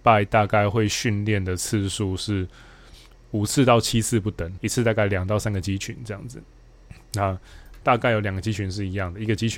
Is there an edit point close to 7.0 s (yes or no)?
no